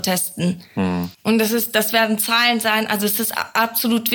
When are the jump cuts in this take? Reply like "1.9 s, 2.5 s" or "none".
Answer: 1.1 s